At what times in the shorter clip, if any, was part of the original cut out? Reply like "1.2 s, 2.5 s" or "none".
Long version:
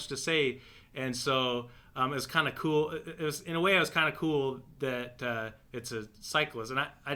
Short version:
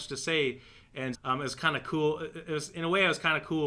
1.1 s